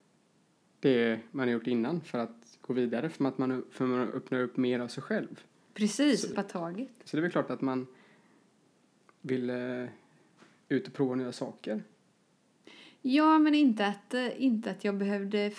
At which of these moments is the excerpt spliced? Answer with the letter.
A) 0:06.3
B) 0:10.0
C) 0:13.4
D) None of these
A